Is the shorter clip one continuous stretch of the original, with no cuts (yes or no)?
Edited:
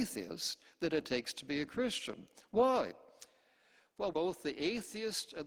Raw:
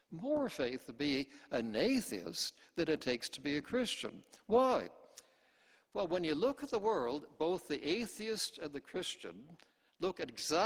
no